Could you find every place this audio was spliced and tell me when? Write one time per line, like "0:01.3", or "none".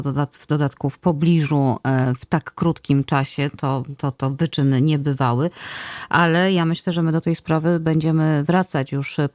none